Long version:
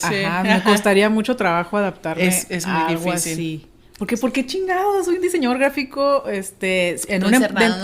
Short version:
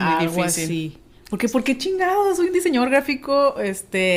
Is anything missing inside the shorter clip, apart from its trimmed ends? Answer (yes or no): no